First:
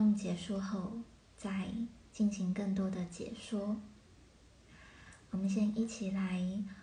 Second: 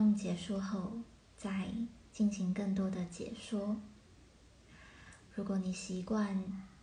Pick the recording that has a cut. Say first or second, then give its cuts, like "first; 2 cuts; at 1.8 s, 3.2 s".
second; 1 cut; at 5.3 s